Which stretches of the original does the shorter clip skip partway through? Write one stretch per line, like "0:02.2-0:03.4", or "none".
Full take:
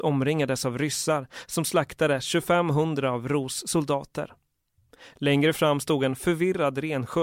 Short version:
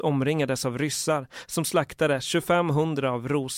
none